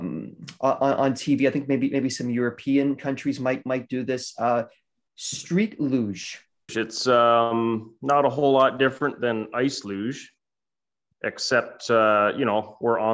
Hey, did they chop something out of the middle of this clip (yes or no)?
yes